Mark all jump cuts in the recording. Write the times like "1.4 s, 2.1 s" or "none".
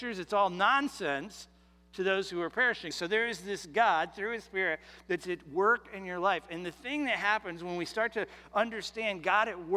2.9 s